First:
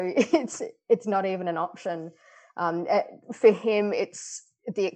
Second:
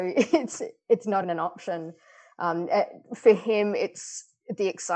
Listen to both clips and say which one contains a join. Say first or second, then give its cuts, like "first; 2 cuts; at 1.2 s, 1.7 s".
second; 1 cut; at 1.2 s